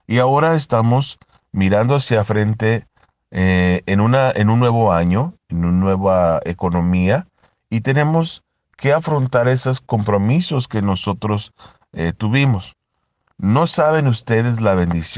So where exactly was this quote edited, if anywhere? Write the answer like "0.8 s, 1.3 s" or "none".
none